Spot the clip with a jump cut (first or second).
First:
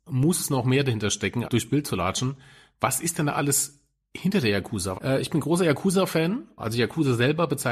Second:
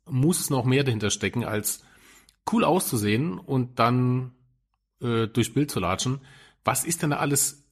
first